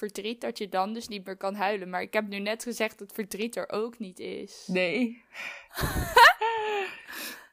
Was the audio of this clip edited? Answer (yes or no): no